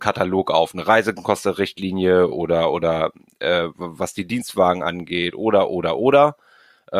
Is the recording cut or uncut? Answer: uncut